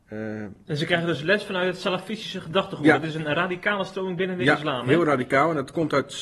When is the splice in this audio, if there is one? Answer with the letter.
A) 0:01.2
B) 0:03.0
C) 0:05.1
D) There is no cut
D